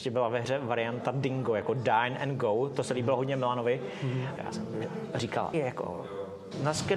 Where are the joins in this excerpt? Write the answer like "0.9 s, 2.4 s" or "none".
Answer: 4.4 s, 5.5 s